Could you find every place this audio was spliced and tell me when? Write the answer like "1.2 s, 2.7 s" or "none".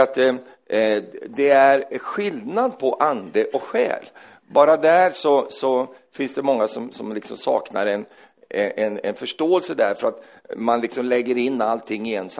6.9 s